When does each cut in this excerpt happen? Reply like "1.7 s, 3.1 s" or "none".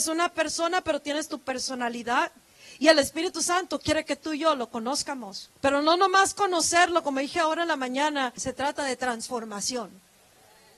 5.5 s, 8.4 s